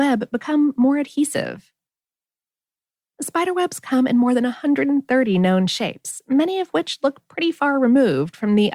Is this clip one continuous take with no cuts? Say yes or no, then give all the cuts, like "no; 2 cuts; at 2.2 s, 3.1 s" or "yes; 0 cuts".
no; 1 cut; at 3.1 s